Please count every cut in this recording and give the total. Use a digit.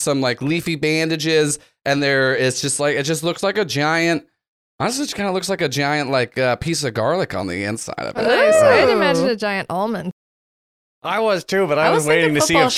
0